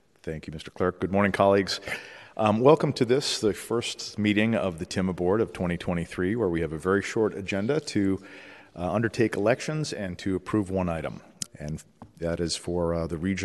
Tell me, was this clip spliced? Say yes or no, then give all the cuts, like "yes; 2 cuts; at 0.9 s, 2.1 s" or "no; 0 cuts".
yes; 1 cut; at 11.5 s